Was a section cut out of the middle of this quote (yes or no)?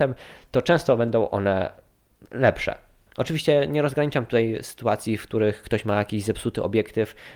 yes